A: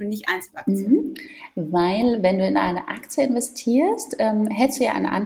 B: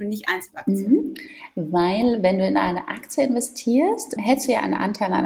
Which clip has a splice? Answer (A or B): B